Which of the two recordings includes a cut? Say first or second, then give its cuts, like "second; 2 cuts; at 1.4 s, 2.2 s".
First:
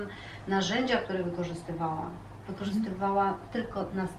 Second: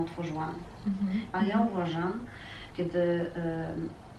second; 2 cuts; at 1.3 s, 2.7 s